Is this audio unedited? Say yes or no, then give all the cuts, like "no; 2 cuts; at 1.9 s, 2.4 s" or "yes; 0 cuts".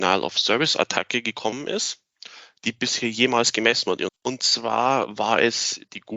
no; 1 cut; at 4.1 s